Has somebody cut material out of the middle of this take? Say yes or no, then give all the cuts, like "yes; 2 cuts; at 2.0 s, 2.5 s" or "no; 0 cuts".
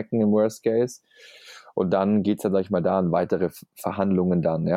no; 0 cuts